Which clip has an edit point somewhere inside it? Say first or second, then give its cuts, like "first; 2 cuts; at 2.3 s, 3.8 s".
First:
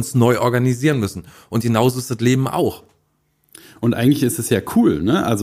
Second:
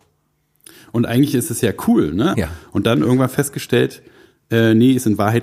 second; 1 cut; at 2.3 s